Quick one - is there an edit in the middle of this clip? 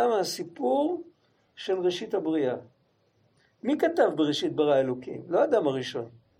no; 0 cuts

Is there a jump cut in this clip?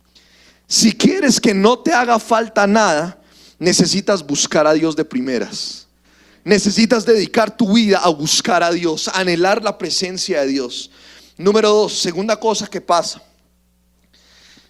no; 0 cuts

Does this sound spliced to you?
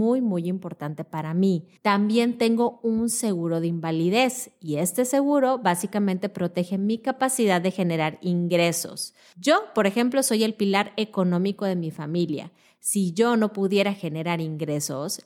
yes; 1 cut; at 1.8 s

